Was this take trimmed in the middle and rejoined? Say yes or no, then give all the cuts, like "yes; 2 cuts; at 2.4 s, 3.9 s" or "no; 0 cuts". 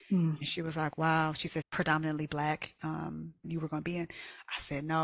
yes; 2 cuts; at 1.6 s, 3.4 s